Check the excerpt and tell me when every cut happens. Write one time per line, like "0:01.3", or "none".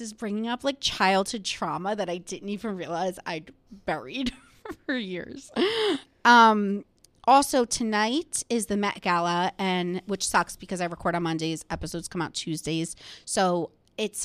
none